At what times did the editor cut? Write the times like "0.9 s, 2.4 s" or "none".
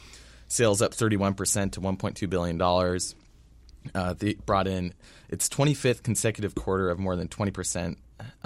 4.4 s